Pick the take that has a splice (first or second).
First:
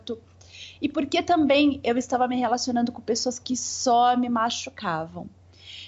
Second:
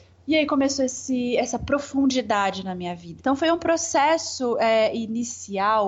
second